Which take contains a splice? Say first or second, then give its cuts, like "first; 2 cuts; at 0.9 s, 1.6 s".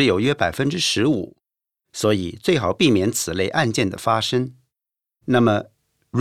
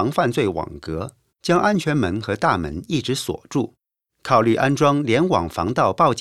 second; 1 cut; at 1.3 s